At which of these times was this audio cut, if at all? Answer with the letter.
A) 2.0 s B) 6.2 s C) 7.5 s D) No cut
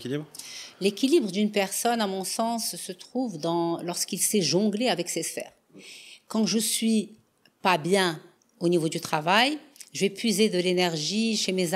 D